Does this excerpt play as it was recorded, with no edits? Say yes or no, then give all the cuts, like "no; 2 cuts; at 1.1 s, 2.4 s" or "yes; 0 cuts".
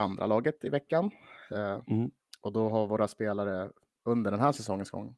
yes; 0 cuts